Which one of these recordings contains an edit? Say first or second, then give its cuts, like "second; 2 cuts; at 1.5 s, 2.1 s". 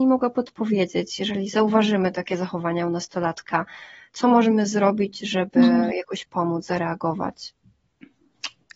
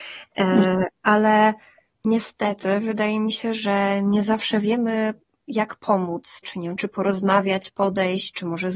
second; 1 cut; at 6.4 s